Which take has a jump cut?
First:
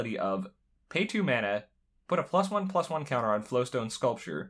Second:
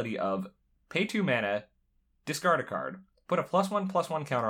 first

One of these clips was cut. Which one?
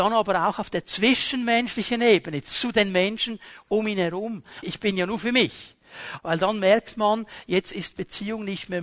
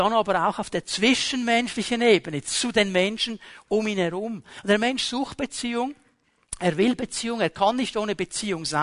first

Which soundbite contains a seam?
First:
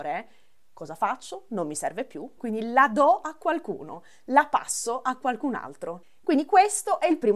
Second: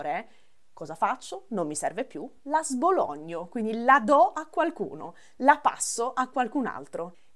first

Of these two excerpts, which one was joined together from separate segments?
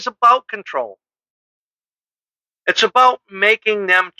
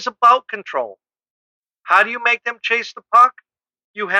second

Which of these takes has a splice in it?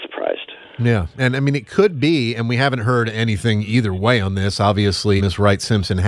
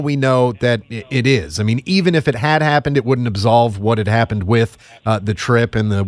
first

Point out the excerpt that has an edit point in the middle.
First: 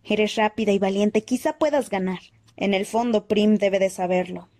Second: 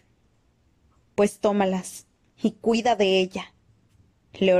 first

